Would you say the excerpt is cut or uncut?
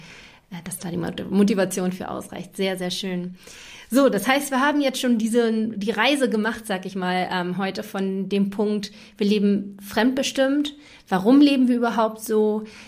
uncut